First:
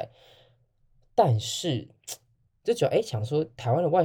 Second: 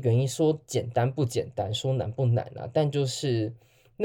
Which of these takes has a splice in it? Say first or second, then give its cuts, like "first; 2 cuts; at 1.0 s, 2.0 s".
first; 1 cut; at 2.5 s